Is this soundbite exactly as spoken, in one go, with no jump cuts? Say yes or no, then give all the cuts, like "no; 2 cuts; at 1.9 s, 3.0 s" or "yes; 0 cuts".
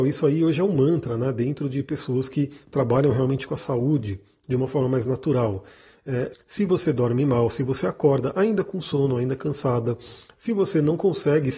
no; 1 cut; at 6.3 s